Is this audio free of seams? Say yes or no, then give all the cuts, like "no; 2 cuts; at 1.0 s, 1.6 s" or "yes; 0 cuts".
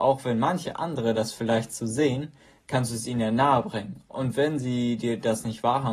yes; 0 cuts